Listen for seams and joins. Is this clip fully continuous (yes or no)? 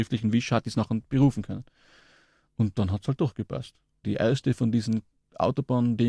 no